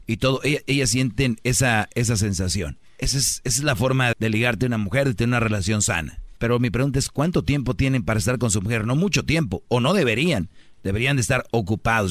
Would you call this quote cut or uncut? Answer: cut